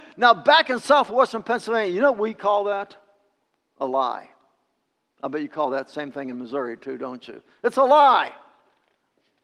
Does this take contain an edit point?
no; 0 cuts

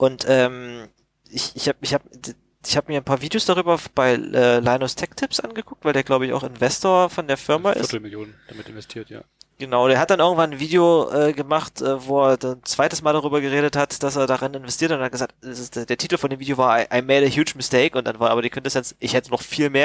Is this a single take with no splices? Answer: yes; 0 cuts

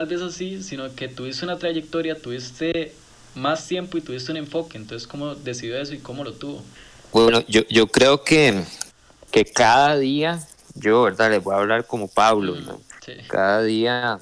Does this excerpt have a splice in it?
no; 0 cuts

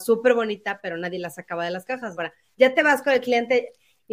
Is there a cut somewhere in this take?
yes; 1 cut; at 2.1 s

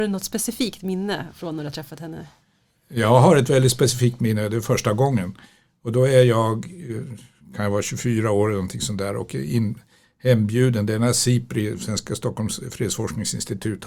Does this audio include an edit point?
no; 0 cuts

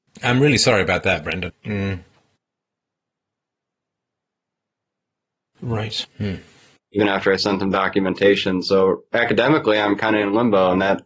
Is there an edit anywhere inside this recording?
yes; 2 cuts; at 1.5 s, 6.0 s

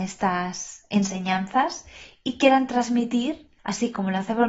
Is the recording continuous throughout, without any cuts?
no; 1 cut; at 3.6 s

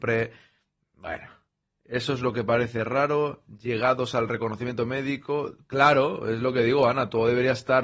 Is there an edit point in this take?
no; 0 cuts

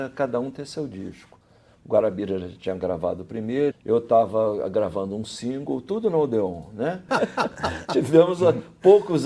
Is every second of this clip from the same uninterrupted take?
no; 2 cuts; at 3.7 s, 7.1 s

